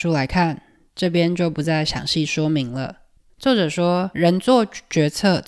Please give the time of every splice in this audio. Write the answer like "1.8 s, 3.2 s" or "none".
3.3 s